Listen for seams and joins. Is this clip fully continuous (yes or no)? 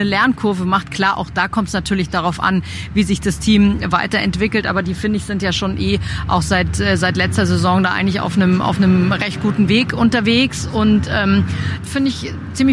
no